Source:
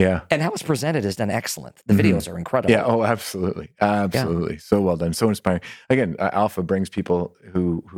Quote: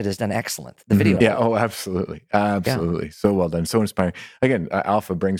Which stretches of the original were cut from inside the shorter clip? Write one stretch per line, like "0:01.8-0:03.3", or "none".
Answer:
0:02.2-0:02.6